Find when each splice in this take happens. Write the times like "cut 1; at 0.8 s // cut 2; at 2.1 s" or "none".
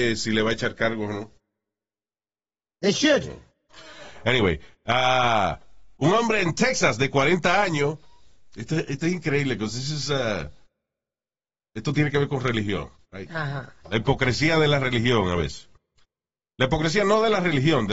none